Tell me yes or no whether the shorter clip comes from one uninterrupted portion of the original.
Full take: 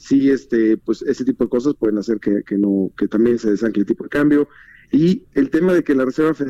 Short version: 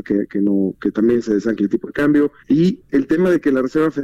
no